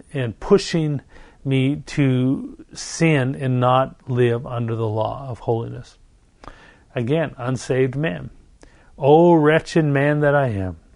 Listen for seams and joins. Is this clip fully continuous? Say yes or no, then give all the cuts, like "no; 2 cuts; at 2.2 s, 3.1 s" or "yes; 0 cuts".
yes; 0 cuts